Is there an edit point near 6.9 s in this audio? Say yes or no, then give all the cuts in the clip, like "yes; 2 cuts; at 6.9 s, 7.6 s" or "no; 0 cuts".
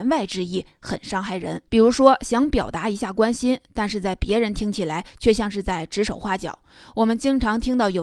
no; 1 cut; at 1.7 s